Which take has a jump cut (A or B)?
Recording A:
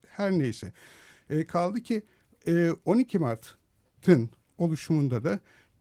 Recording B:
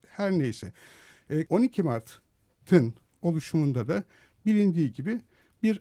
B